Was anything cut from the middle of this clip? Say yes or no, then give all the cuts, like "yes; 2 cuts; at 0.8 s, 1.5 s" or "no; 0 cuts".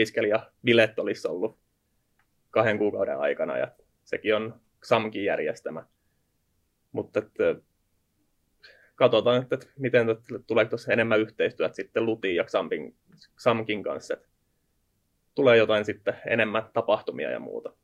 no; 0 cuts